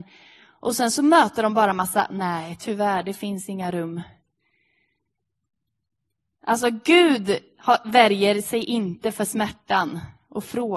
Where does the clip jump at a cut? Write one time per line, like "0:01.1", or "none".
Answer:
none

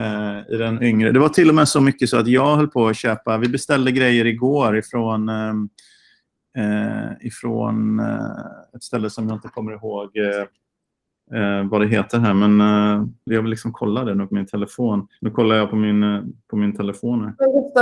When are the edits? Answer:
0:13.3
0:15.2

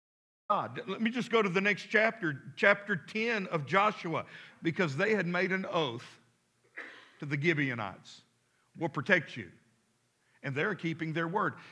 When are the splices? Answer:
0:04.5

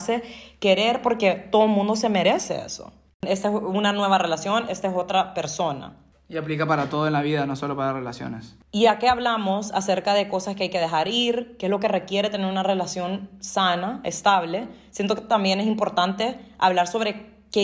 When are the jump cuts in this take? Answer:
0:03.2

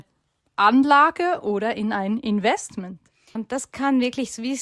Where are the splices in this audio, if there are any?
0:03.4

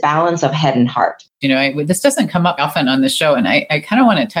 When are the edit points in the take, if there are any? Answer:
0:01.4
0:02.6

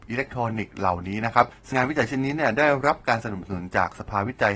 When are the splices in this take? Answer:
0:01.7

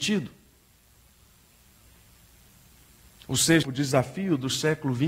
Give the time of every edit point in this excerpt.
0:03.6

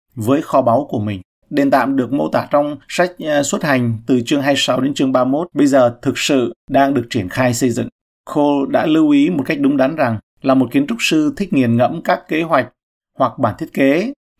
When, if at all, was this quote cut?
0:01.4

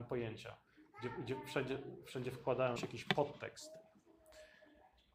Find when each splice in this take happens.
0:02.8

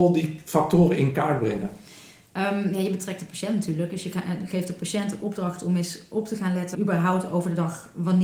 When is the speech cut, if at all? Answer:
0:06.7

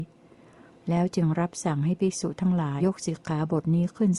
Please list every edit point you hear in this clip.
0:02.8

